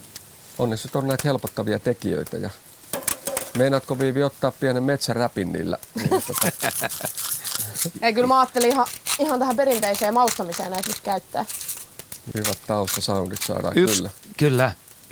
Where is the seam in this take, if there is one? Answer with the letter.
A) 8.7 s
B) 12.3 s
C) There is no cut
B